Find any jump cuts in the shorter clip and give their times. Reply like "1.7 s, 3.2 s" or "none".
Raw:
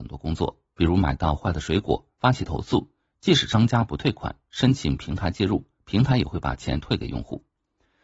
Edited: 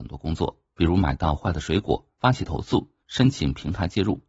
3.0 s